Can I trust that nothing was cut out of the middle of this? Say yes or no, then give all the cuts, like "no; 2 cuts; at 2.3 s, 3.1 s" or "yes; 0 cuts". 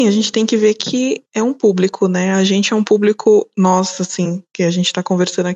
yes; 0 cuts